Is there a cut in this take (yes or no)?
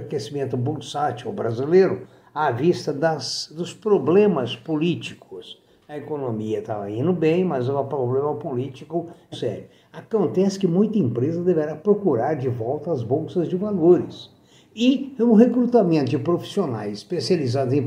yes